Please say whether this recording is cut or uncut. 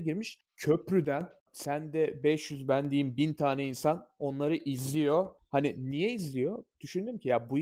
uncut